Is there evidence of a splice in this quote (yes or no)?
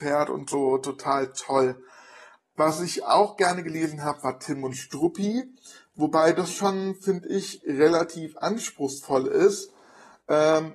no